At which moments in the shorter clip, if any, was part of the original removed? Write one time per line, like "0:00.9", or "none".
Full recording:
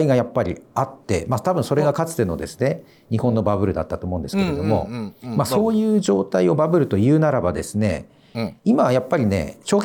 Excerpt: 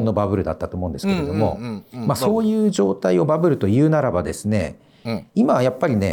none